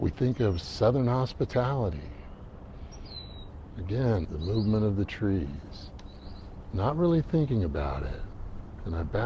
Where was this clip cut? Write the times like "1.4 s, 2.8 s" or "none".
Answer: 4.3 s